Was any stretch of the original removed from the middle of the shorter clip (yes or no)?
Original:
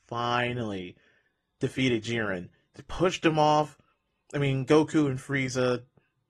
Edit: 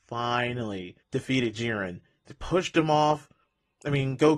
yes